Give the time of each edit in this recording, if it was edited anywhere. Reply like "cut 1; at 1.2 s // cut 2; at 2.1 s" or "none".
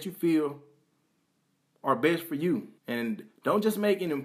cut 1; at 2.8 s

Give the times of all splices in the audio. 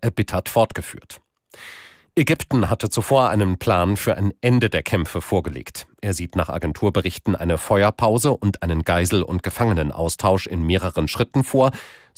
none

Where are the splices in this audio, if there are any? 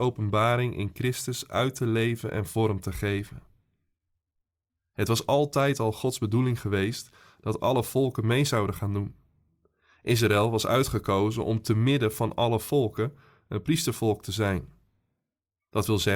none

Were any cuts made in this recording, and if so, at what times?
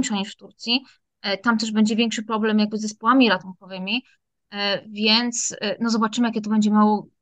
none

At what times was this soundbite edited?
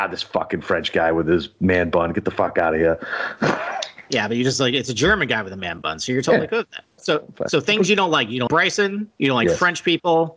cut 1; at 7.0 s // cut 2; at 8.5 s

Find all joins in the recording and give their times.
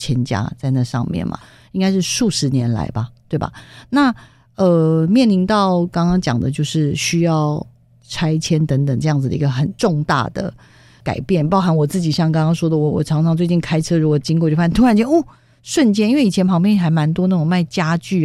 none

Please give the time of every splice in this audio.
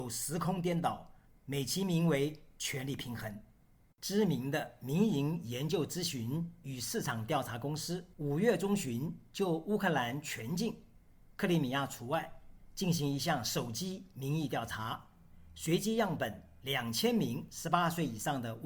cut 1; at 1.3 s // cut 2; at 3.9 s // cut 3; at 8.1 s

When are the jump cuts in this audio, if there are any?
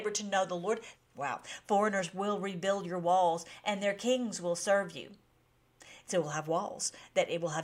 cut 1; at 0.9 s

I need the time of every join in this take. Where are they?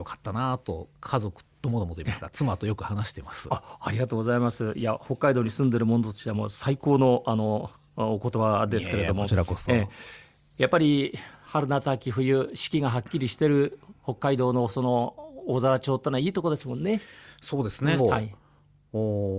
cut 1; at 18.0 s

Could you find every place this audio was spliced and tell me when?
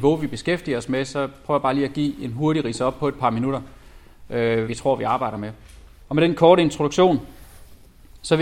cut 1; at 4.7 s // cut 2; at 6.0 s

